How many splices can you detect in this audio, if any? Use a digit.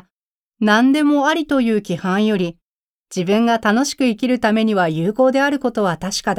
1